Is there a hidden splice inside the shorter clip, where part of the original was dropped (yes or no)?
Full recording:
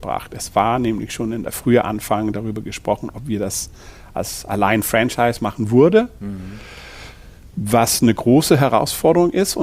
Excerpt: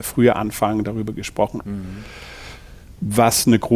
yes